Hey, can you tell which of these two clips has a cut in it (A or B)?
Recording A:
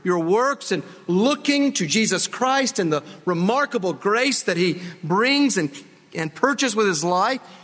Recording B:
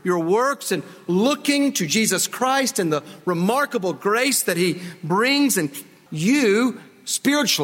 B